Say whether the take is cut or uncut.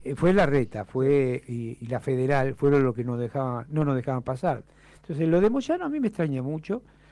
uncut